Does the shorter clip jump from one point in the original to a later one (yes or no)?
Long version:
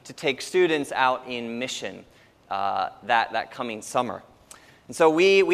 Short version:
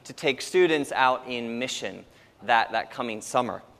yes